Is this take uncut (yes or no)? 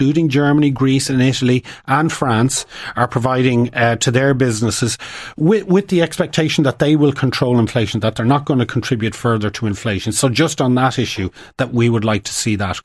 yes